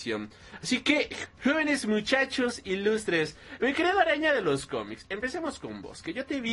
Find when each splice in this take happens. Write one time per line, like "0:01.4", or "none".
0:01.2